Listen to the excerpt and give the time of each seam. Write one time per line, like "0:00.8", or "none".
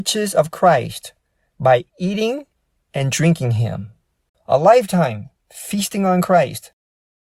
0:04.3